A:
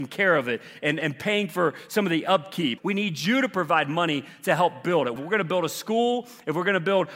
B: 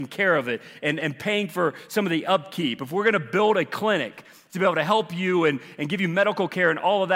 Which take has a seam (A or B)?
A